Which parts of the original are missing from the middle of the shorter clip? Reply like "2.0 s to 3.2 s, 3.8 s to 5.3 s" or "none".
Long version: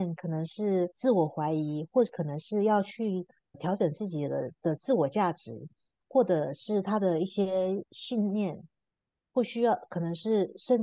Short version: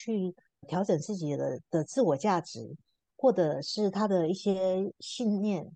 none